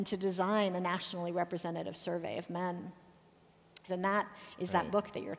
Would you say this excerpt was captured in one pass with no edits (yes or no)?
no